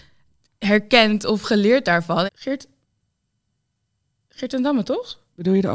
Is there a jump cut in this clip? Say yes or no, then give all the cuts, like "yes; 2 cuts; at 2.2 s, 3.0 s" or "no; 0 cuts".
yes; 1 cut; at 2.3 s